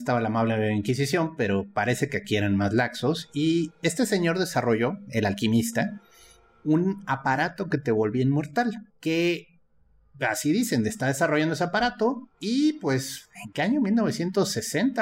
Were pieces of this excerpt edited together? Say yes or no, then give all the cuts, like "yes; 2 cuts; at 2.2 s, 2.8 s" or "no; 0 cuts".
yes; 2 cuts; at 8.9 s, 12.3 s